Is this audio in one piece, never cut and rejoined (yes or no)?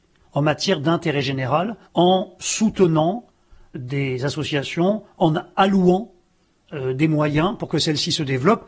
no